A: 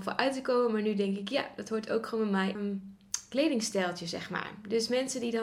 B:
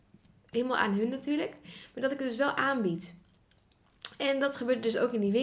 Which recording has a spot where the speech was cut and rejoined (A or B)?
A